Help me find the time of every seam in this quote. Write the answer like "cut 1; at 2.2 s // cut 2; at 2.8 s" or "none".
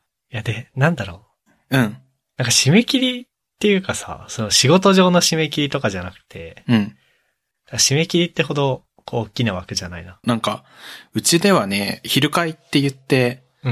cut 1; at 10.2 s